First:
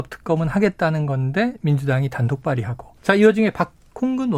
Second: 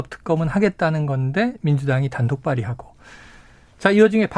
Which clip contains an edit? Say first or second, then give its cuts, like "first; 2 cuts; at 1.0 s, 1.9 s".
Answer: first; 1 cut; at 3.0 s